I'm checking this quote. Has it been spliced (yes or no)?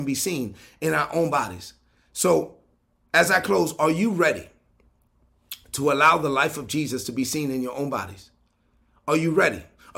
no